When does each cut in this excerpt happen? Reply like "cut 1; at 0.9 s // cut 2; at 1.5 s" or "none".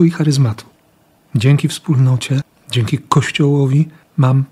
none

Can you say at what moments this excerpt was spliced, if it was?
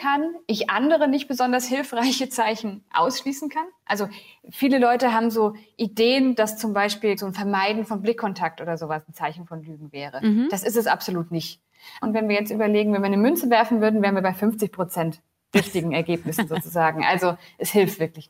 cut 1; at 7.2 s // cut 2; at 12.0 s

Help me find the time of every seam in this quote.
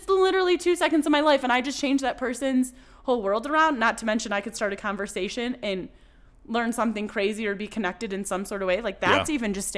none

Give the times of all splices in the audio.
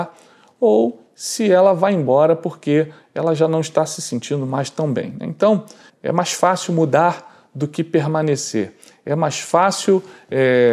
cut 1; at 5.9 s

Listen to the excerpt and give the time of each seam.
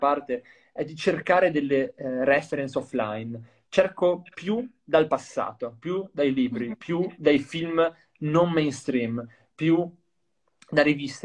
none

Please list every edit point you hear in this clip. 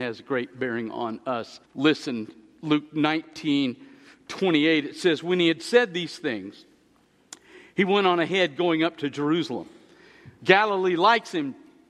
cut 1; at 1.6 s // cut 2; at 10.4 s

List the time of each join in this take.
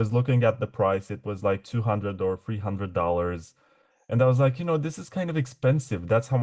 none

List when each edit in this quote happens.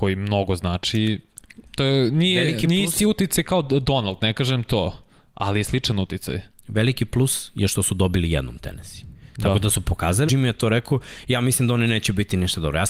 cut 1; at 10.3 s

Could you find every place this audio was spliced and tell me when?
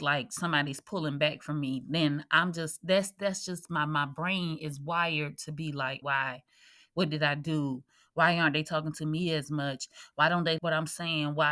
cut 1; at 6.0 s // cut 2; at 10.6 s

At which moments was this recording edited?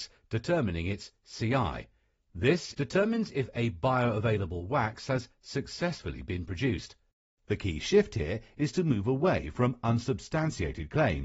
cut 1; at 2.7 s

